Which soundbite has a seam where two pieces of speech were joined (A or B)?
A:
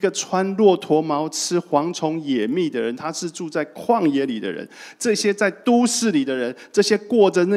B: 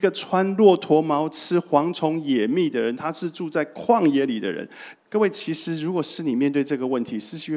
B